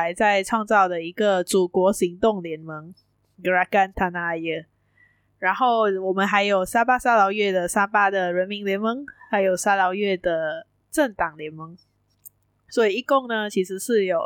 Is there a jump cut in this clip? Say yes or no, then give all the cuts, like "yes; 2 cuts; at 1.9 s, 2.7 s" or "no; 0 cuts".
no; 0 cuts